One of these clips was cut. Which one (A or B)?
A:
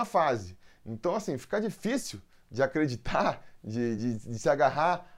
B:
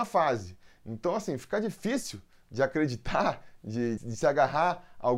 B